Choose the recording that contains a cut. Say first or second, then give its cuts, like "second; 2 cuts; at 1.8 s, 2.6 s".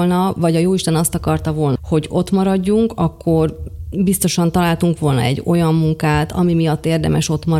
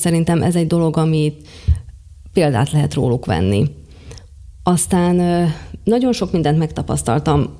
first; 1 cut; at 1.8 s